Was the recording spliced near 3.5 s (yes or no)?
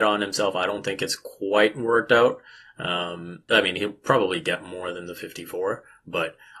yes